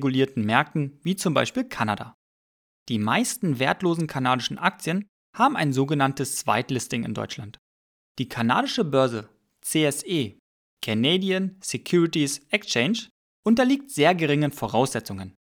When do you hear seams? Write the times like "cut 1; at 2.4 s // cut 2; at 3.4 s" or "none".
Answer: none